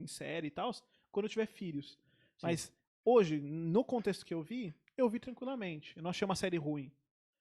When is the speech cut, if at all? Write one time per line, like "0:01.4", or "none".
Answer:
none